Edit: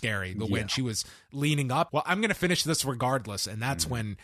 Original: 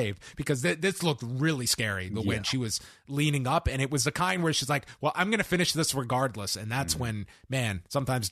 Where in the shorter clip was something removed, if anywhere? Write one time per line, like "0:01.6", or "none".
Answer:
0:01.9

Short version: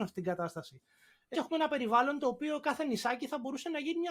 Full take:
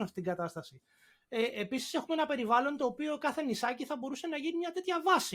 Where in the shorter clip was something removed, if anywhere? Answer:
0:01.3

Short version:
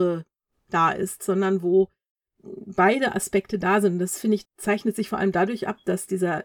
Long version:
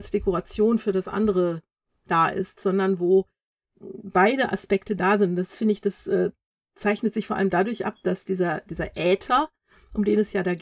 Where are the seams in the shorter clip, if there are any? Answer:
0:04.4

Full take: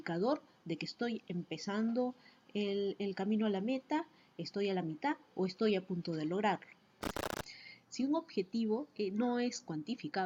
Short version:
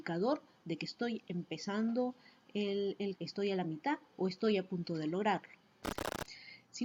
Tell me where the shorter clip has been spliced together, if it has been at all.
0:03.2

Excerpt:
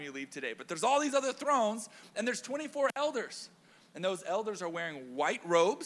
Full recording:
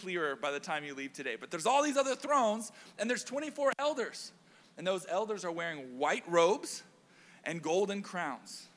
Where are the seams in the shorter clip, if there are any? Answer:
none

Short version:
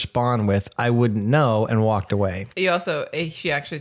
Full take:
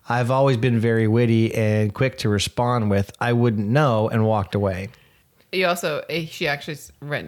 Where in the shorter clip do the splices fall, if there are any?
0:02.5

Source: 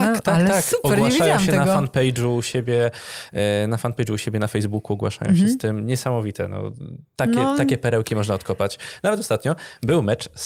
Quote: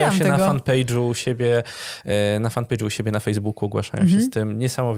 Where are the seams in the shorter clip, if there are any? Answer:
none

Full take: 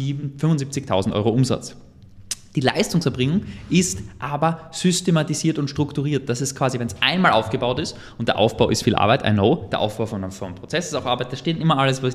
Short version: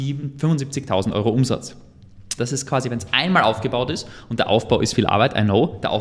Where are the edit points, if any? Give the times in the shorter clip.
0:02.4

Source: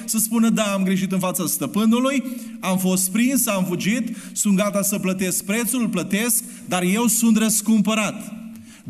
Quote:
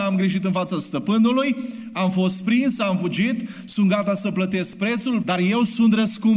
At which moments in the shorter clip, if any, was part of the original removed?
0:05.2

